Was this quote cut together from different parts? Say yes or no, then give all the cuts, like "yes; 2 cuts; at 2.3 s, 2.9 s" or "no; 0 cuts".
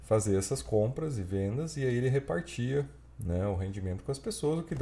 no; 0 cuts